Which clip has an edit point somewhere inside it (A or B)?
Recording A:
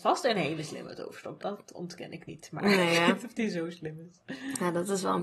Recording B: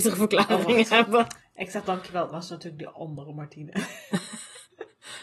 A